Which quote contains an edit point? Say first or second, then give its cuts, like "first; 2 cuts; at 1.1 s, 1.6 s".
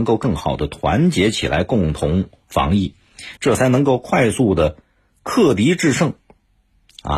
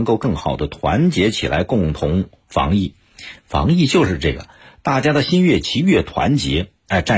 first; 1 cut; at 3.4 s